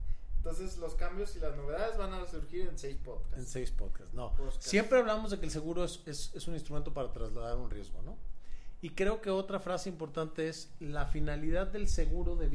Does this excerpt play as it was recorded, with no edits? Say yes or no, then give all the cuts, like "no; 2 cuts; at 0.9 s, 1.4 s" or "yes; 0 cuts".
yes; 0 cuts